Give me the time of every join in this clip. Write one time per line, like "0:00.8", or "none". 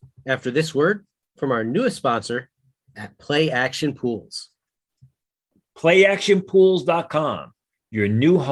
0:05.7